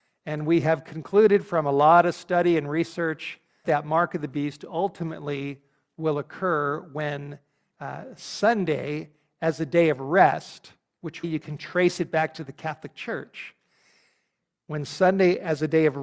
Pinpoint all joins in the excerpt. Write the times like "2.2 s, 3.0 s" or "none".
3.6 s, 11.2 s

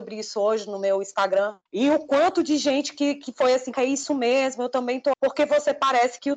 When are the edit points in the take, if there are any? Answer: 1.7 s, 3.7 s, 5.1 s

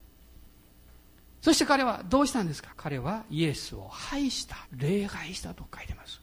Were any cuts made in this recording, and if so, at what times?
2.7 s, 4.7 s

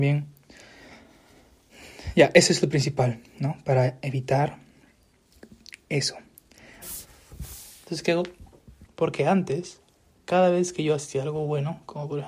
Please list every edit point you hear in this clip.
6.8 s, 8.9 s

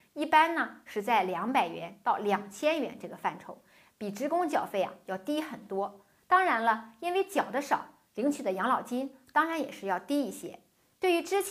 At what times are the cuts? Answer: none

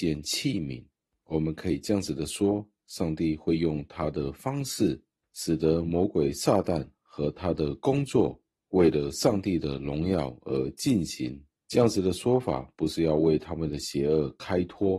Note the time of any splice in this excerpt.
none

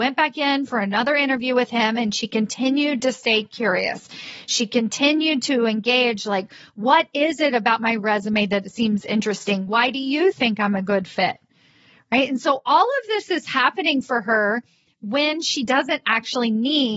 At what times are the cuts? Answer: none

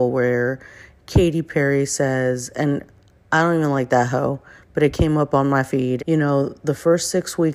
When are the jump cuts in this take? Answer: 6.0 s

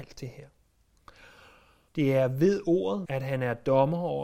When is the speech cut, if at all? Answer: 1.9 s, 3.0 s

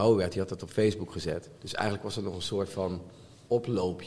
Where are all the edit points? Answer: 1.6 s

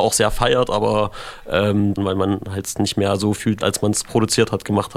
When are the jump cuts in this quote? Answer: 2.0 s, 3.6 s

